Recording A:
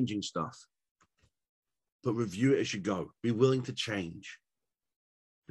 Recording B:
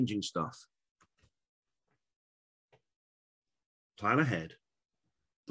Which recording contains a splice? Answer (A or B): A